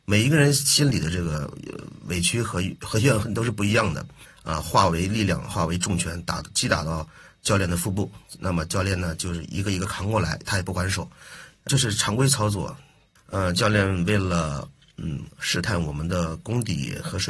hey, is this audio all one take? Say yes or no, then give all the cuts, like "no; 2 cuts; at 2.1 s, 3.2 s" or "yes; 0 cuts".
no; 2 cuts; at 11.6 s, 13.2 s